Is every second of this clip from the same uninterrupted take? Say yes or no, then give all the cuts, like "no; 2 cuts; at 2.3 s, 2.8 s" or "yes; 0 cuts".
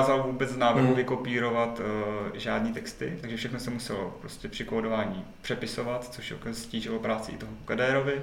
yes; 0 cuts